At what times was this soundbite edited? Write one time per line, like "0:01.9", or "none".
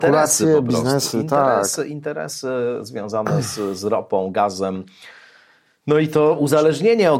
none